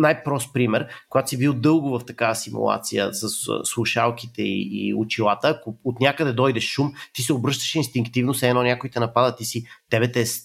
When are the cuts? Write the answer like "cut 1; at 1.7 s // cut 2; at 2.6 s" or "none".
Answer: none